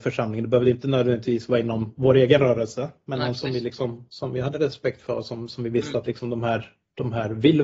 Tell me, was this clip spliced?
no; 0 cuts

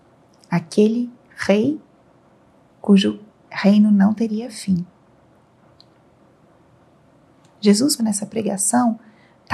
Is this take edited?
yes; 1 cut; at 8.0 s

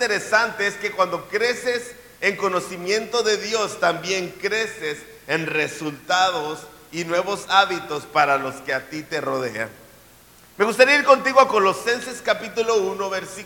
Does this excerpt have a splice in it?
no; 0 cuts

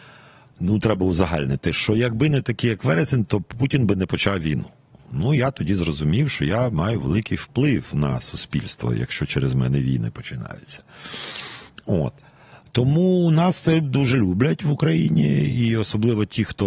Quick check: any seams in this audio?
no; 0 cuts

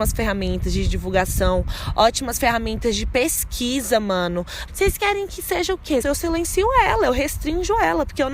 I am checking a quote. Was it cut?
yes; 2 cuts; at 4.7 s, 6.0 s

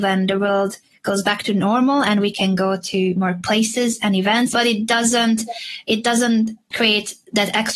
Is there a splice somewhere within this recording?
yes; 2 cuts; at 4.5 s, 6.7 s

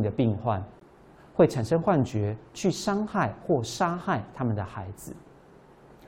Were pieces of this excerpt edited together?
no; 0 cuts

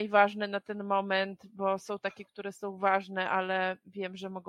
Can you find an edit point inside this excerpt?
no; 0 cuts

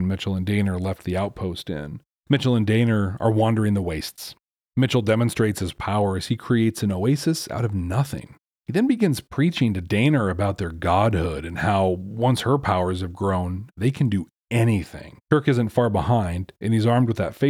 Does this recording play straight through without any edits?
no; 1 cut; at 2.2 s

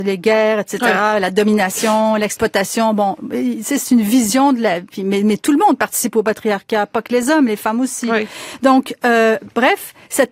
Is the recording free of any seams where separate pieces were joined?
yes; 0 cuts

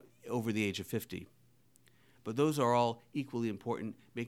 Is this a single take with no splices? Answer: no; 1 cut; at 2.1 s

